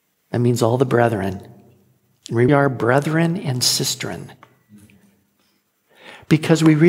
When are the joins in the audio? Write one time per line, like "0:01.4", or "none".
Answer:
0:02.5